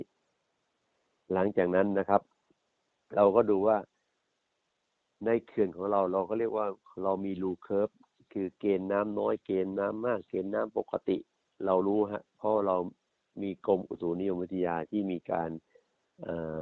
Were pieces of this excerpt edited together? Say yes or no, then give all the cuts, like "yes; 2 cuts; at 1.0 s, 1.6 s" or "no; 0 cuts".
no; 0 cuts